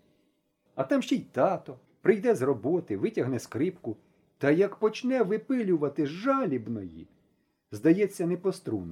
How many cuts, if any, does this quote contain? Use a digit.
1